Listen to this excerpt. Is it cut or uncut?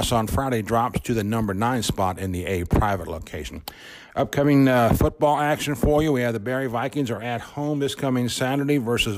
uncut